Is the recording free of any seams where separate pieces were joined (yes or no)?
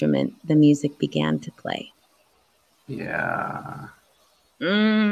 yes